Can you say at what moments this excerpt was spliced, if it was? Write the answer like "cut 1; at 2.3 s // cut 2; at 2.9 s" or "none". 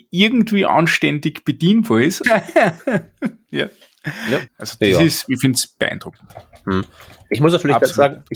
cut 1; at 2.2 s // cut 2; at 4.5 s